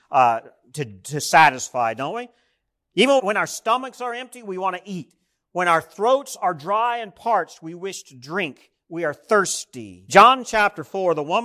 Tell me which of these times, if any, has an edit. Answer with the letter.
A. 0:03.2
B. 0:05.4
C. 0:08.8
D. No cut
A